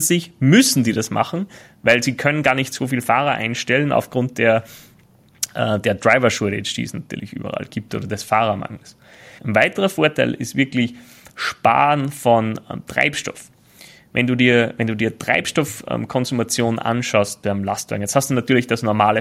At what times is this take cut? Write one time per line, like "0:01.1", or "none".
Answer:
0:09.4